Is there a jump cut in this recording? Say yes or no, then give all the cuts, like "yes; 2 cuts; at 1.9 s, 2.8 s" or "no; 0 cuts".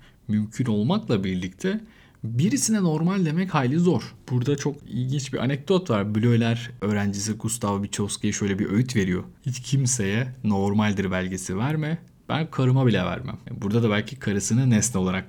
no; 0 cuts